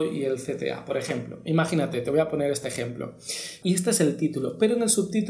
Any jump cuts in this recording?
yes; 1 cut; at 3.6 s

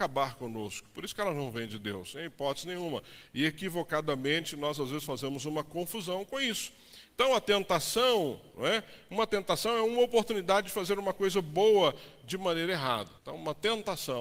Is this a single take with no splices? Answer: no; 1 cut; at 13.2 s

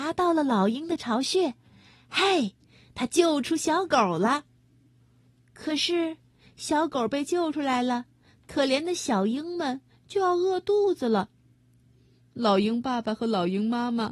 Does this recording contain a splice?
no; 0 cuts

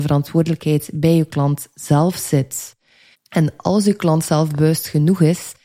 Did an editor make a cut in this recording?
yes; 1 cut; at 3.1 s

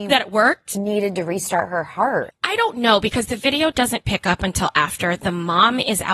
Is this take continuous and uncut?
no; 1 cut; at 2.3 s

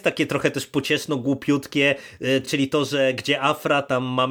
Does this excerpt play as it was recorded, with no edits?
yes; 0 cuts

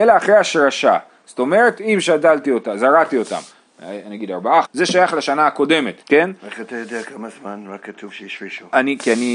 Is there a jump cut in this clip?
yes; 2 cuts; at 4.6 s, 6.0 s

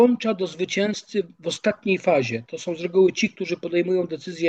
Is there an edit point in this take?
no; 0 cuts

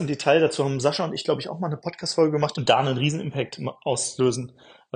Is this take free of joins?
no; 1 cut; at 2.5 s

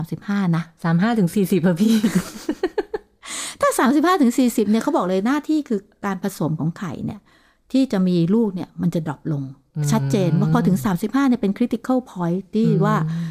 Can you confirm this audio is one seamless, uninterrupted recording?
yes; 0 cuts

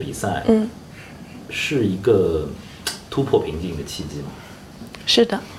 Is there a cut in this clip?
no; 0 cuts

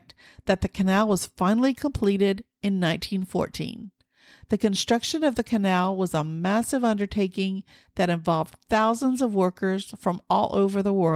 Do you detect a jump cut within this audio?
no; 0 cuts

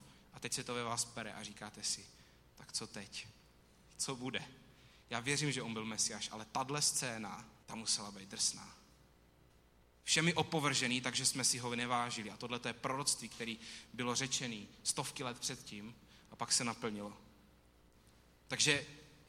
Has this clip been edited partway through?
no; 0 cuts

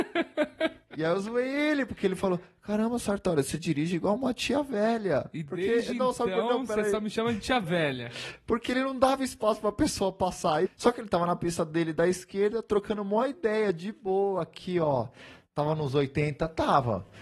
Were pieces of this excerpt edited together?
yes; 1 cut; at 10.7 s

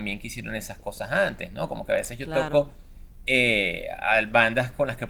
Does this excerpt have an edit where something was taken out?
no; 0 cuts

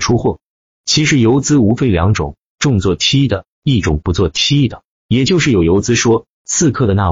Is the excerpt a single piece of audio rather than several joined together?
no; 1 cut; at 5.0 s

